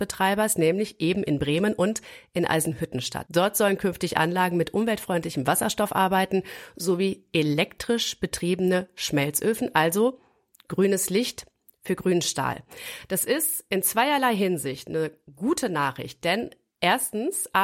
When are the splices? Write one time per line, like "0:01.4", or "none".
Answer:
none